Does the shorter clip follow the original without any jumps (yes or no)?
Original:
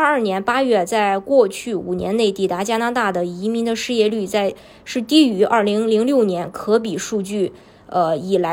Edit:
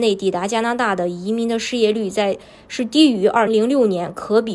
no